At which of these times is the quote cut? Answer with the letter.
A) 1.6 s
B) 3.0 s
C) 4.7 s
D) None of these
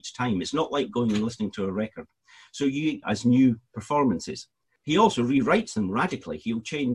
B